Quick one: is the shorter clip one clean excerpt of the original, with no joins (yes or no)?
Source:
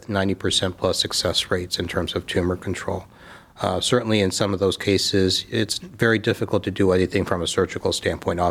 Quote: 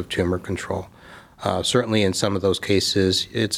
yes